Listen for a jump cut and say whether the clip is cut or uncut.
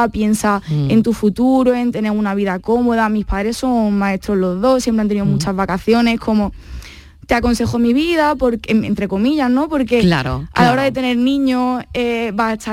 uncut